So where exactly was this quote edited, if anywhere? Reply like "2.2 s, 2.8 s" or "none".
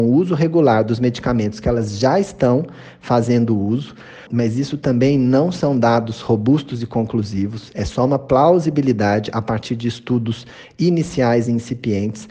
4.3 s